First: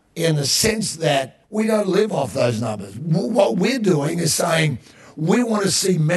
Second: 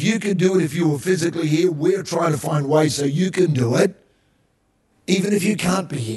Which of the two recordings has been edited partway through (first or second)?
first